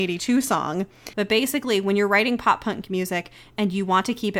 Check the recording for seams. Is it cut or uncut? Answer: cut